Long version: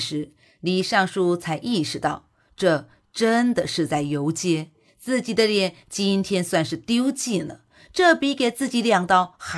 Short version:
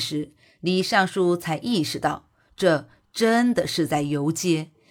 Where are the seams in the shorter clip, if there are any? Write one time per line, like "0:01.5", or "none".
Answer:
none